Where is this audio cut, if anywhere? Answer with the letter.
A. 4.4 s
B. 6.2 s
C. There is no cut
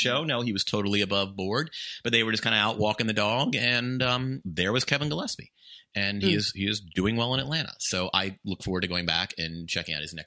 A